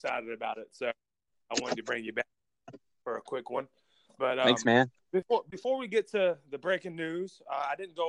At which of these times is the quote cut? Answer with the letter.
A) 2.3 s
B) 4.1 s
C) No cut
C